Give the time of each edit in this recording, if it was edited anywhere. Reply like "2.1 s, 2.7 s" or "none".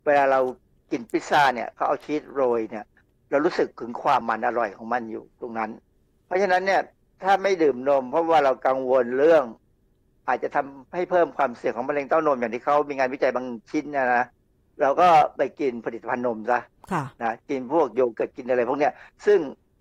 4.2 s